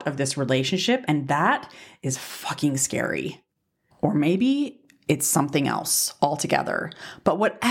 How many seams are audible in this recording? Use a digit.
0